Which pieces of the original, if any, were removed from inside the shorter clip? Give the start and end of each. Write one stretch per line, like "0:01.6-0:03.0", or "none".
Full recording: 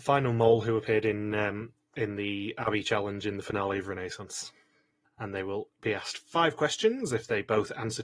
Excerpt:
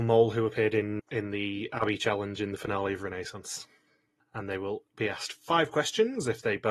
0:01.3-0:01.8